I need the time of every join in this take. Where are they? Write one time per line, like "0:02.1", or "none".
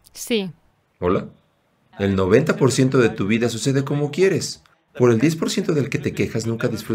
0:01.9